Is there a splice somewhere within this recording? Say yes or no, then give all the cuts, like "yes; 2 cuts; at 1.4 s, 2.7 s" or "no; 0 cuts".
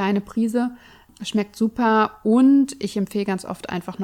no; 0 cuts